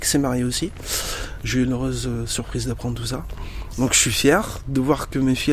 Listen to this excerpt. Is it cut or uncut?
uncut